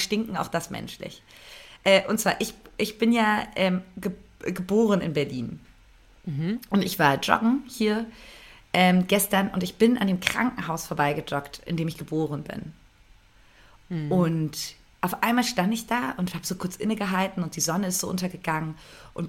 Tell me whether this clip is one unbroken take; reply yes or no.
yes